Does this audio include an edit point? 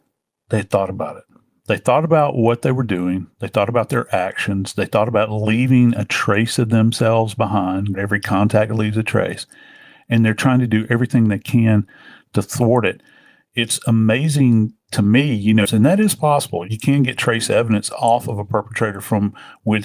yes; 2 cuts; at 7.9 s, 15.7 s

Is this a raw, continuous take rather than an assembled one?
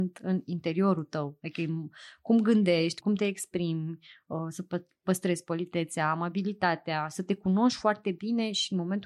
no; 1 cut; at 3.0 s

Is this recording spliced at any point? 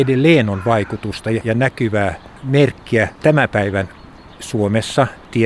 yes; 2 cuts; at 1.4 s, 3.2 s

